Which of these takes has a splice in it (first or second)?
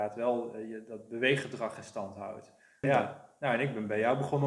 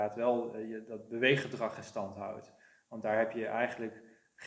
first